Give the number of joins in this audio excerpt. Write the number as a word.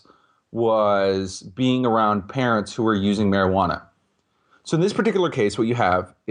zero